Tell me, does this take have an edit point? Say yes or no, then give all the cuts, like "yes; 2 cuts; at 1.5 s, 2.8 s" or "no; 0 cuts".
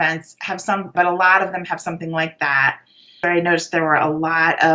yes; 2 cuts; at 0.9 s, 3.2 s